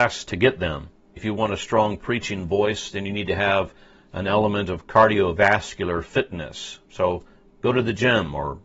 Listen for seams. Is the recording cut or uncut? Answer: cut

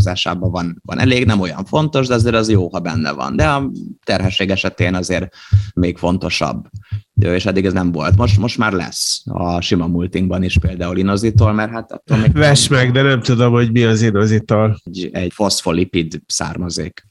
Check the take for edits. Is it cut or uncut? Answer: uncut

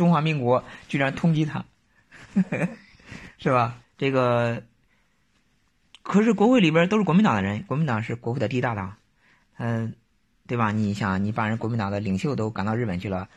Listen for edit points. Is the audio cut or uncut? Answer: cut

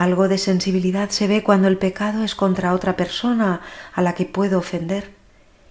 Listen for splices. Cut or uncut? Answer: uncut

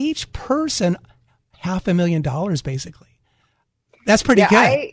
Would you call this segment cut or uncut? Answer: uncut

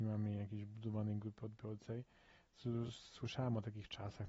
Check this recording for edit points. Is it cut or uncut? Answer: uncut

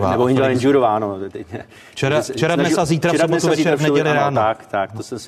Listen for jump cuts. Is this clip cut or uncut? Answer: uncut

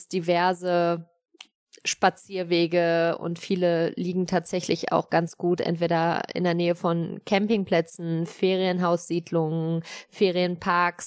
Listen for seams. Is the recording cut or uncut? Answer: uncut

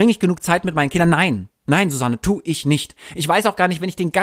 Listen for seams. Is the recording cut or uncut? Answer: uncut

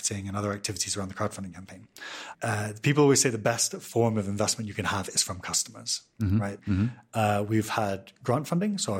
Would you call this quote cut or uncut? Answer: cut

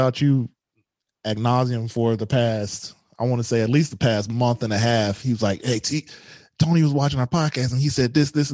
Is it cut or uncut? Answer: uncut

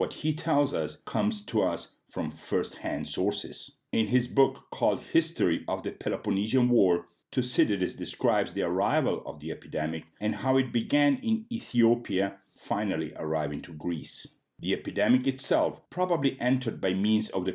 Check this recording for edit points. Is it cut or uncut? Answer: cut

